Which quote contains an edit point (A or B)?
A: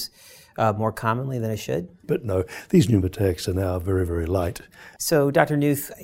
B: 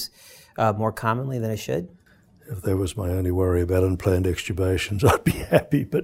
A